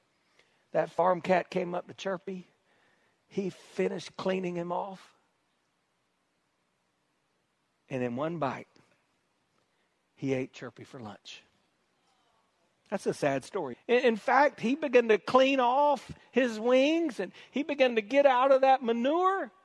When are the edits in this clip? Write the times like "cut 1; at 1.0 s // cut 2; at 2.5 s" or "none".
cut 1; at 13.7 s